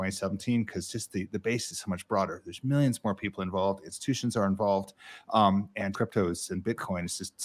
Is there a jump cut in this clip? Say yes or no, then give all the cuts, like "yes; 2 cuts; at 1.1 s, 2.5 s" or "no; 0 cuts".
yes; 1 cut; at 5.9 s